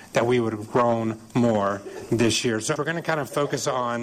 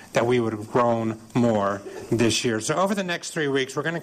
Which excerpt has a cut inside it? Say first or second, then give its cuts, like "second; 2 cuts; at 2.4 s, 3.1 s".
first; 1 cut; at 2.8 s